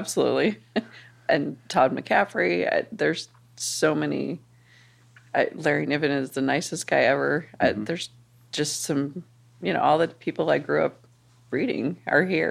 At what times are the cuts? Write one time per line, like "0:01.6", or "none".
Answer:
none